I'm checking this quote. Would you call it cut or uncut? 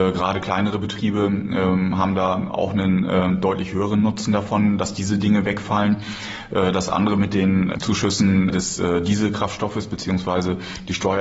cut